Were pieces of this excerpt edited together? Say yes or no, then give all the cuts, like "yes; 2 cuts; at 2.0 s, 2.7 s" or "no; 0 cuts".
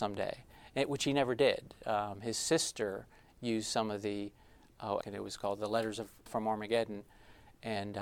yes; 2 cuts; at 5.0 s, 6.3 s